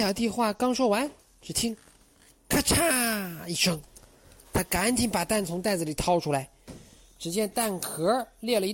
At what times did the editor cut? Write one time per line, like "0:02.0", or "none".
none